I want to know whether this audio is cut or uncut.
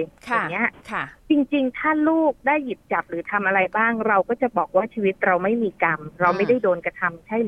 cut